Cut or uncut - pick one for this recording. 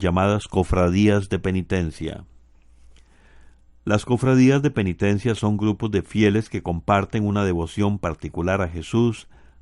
uncut